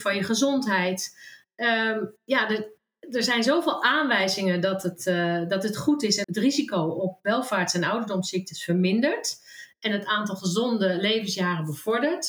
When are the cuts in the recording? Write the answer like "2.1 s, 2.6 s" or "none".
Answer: 6.2 s